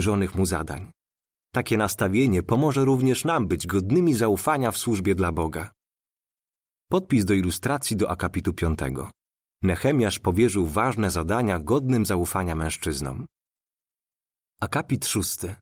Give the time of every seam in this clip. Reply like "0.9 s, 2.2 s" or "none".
none